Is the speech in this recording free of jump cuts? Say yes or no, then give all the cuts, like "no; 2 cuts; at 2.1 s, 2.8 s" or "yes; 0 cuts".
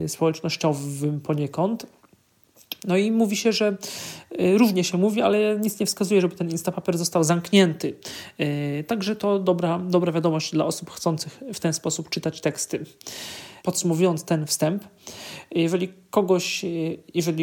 yes; 0 cuts